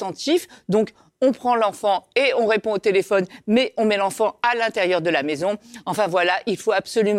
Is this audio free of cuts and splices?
yes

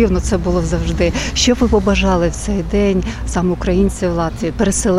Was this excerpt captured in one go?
yes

